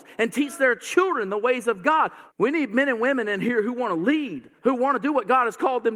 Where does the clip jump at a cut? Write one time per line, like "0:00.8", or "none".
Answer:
0:02.3
0:04.6